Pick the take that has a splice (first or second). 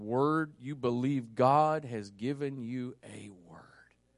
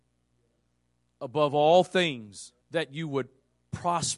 second